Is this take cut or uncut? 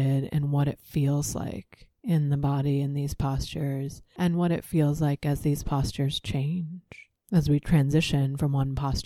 uncut